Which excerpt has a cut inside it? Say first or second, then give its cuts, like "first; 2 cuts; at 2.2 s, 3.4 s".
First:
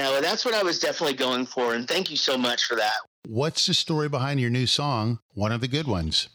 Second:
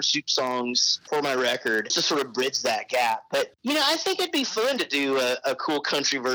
second; 1 cut; at 1.9 s